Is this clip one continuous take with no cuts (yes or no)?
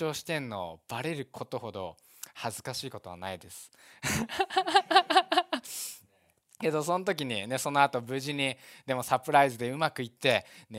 yes